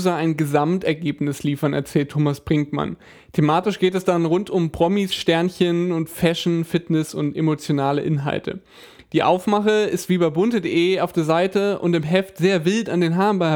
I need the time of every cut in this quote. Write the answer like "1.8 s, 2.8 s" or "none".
none